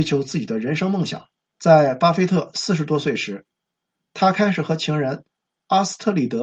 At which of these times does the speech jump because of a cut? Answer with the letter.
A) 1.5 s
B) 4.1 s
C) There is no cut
A